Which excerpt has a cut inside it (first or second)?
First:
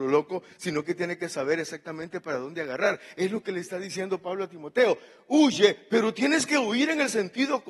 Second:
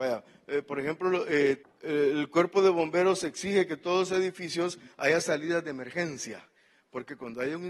second